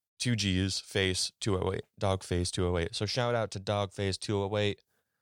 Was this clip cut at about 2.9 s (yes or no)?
no